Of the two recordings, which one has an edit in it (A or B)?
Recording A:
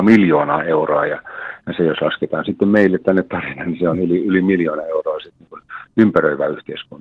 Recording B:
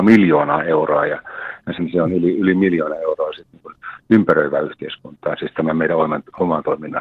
B